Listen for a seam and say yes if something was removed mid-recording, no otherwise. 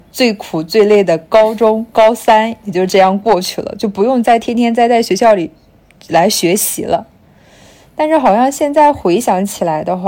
no